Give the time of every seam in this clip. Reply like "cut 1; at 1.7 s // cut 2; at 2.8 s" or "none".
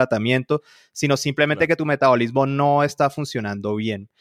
none